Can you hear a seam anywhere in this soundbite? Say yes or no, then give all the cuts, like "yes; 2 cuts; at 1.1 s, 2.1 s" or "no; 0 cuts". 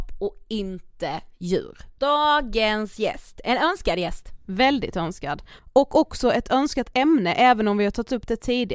yes; 1 cut; at 2.0 s